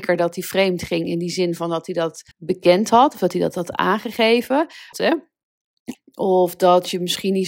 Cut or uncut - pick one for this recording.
cut